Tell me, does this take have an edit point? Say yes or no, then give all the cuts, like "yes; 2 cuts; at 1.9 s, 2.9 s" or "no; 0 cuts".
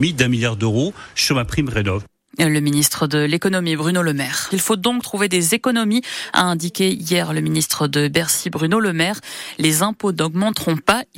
yes; 1 cut; at 4.5 s